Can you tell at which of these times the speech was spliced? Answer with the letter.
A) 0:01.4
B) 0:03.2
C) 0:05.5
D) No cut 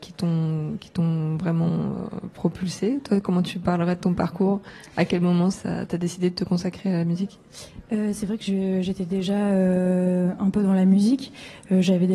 C